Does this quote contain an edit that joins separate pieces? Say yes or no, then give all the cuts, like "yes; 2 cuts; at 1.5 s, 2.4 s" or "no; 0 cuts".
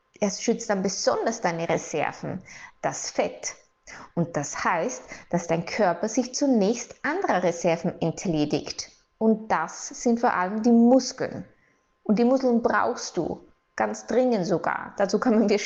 no; 0 cuts